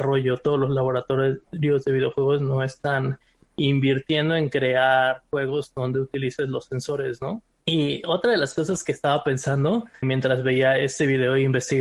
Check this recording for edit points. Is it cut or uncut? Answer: cut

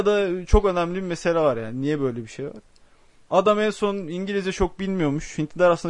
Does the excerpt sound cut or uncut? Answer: uncut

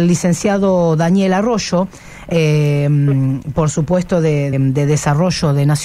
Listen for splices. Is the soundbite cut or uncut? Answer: cut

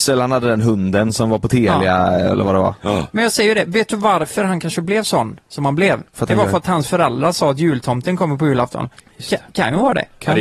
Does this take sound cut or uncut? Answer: uncut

